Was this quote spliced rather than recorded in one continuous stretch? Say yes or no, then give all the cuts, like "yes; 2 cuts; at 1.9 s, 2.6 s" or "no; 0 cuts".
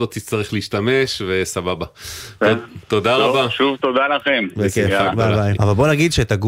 yes; 1 cut; at 5.6 s